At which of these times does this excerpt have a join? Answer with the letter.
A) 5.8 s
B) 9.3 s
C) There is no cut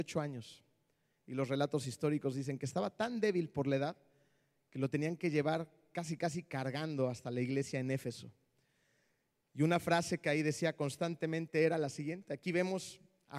C